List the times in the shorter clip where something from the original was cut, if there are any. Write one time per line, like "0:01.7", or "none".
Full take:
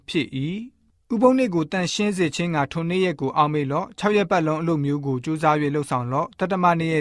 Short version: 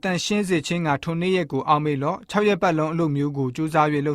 none